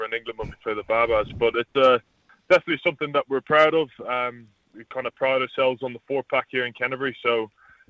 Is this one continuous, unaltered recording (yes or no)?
yes